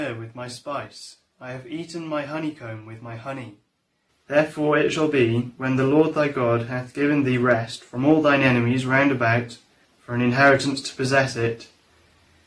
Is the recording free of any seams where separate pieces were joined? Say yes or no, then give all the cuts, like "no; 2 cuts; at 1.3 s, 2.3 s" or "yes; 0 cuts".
no; 2 cuts; at 4.1 s, 9.9 s